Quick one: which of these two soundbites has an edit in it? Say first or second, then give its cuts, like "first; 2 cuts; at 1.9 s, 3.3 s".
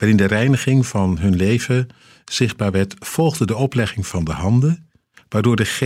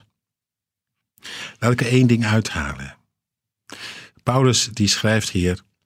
second; 1 cut; at 1.8 s